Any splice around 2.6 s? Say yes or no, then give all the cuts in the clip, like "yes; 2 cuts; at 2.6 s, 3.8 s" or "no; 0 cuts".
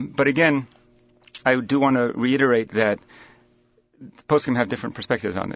no; 1 cut; at 1.4 s